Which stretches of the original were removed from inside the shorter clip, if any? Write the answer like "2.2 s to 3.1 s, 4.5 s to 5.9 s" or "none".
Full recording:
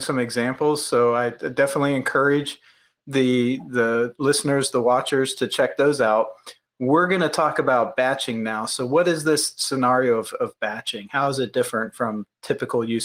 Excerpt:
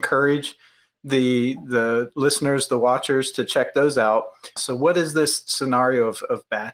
6.6 s to 8.7 s